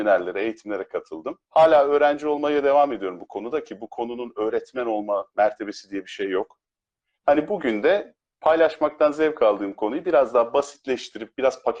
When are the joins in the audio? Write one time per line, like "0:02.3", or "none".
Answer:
0:01.4
0:07.1